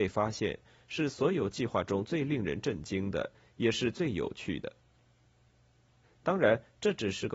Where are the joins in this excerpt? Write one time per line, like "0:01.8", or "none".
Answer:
0:06.0